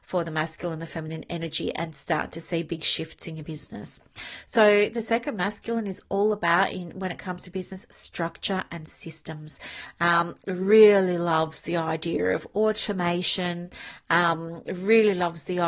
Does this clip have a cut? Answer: no; 0 cuts

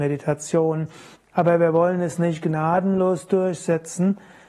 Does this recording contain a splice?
yes; 1 cut; at 1.2 s

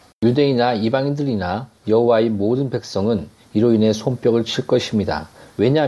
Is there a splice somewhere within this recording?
no; 0 cuts

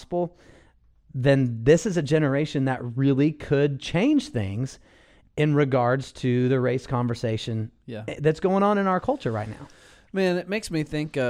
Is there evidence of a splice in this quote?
no; 0 cuts

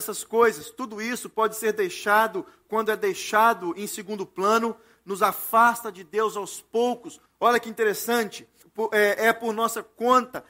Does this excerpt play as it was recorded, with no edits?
no; 2 cuts; at 7.3 s, 8.6 s

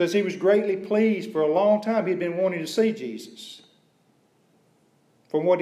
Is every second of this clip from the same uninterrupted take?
yes; 0 cuts

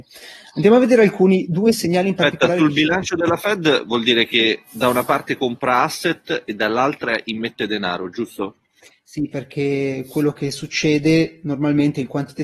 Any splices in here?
no; 0 cuts

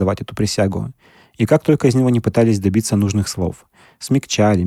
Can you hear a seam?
no; 0 cuts

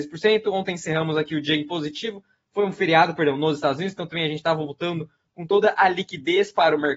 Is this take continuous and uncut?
yes; 0 cuts

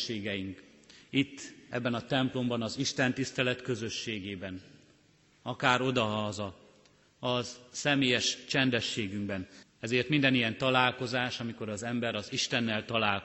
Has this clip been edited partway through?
yes; 1 cut; at 9.6 s

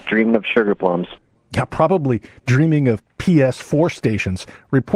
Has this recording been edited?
no; 0 cuts

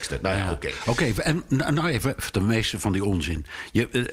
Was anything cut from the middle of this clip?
yes; 1 cut; at 2.2 s

